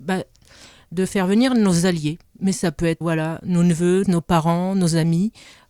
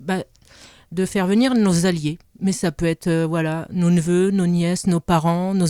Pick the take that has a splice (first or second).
first